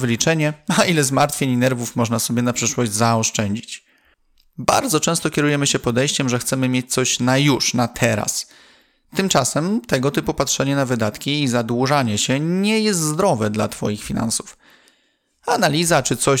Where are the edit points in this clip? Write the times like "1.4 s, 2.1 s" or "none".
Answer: none